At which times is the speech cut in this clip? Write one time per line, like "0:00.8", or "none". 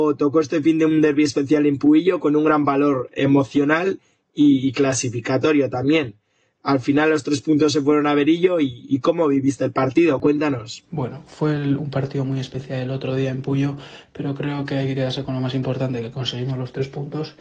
0:10.2